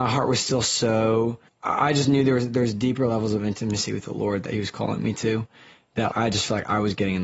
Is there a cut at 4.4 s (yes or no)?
no